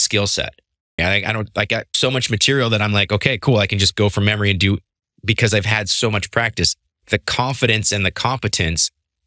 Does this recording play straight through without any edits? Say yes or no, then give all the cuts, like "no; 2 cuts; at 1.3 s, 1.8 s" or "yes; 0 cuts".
no; 1 cut; at 1.0 s